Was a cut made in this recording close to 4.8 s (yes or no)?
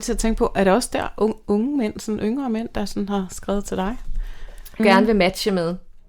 yes